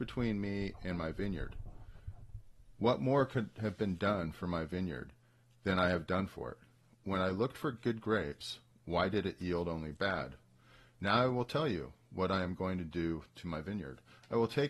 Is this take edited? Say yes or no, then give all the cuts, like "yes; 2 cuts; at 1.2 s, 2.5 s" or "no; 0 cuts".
no; 0 cuts